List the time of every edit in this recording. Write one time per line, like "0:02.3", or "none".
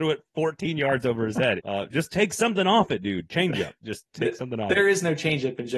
0:01.6